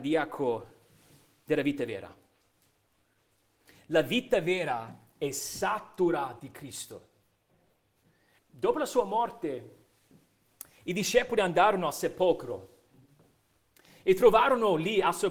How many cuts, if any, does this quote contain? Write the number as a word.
one